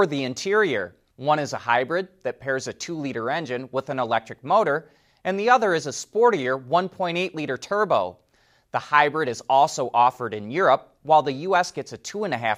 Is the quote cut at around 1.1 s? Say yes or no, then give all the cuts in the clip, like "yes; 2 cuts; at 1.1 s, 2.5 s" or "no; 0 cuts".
yes; 1 cut; at 1.1 s